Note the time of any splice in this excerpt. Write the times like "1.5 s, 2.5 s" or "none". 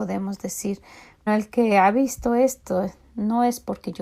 1.3 s